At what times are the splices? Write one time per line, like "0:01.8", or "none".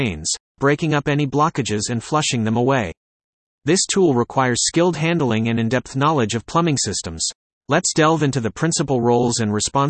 none